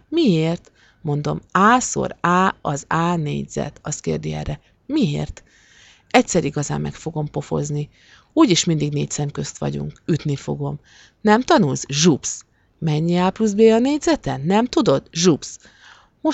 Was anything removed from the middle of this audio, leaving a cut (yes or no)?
no